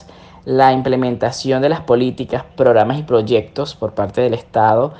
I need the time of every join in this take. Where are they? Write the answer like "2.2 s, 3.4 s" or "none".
2.5 s